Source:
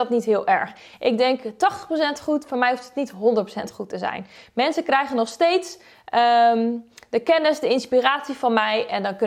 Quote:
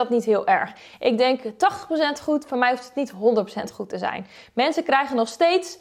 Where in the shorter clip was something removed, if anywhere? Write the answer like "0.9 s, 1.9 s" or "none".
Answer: none